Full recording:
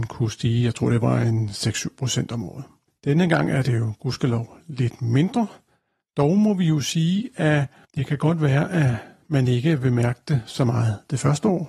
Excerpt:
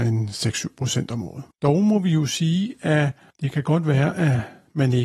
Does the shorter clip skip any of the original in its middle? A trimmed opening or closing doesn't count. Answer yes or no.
yes